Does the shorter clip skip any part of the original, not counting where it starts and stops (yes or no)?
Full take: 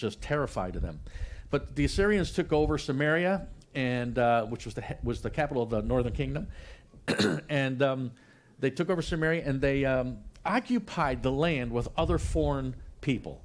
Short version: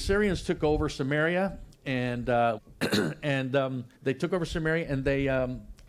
yes